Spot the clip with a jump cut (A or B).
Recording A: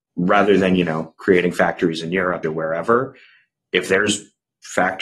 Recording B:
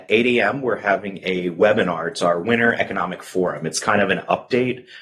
A